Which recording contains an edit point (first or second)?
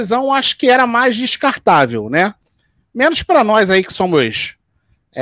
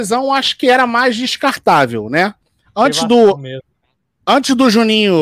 second